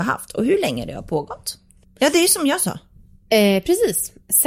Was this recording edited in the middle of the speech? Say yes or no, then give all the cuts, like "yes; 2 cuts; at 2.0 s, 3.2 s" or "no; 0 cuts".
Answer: yes; 1 cut; at 1.8 s